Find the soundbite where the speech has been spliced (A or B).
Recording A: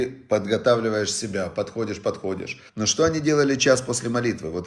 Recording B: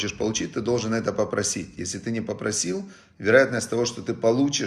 A